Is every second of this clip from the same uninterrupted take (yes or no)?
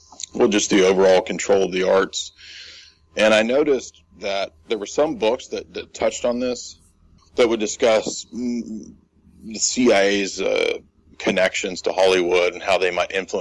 no